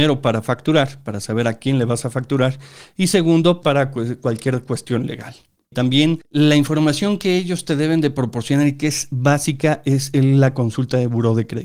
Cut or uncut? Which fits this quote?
cut